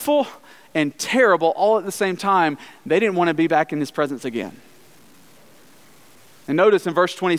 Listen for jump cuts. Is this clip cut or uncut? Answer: uncut